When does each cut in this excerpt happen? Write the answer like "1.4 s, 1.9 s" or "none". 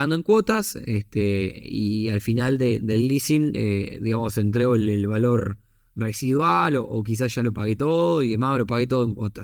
none